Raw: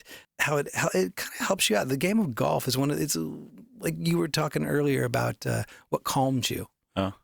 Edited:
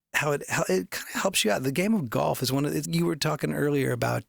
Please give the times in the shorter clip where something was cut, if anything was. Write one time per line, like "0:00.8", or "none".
0:02.8